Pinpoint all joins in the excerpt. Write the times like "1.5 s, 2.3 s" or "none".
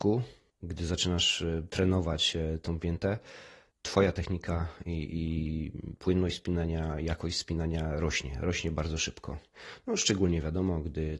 none